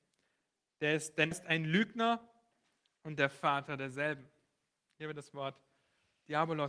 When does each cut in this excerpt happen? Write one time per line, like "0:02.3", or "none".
0:01.3

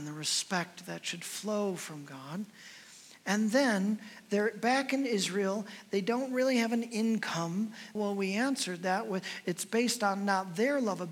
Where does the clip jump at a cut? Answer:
0:07.9

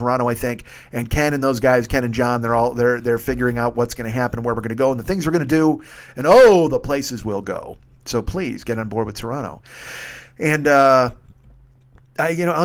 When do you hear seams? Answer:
none

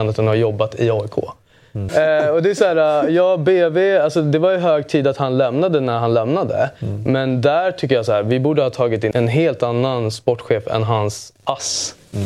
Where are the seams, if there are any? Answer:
0:01.9
0:09.1

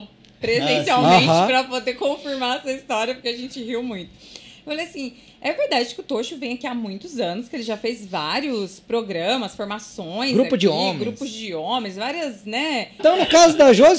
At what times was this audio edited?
0:13.0

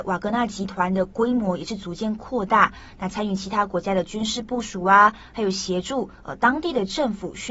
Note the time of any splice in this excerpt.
0:03.0

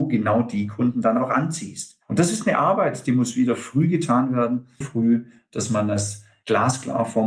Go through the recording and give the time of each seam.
0:04.8

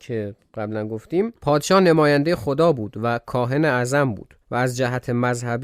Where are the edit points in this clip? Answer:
0:04.4

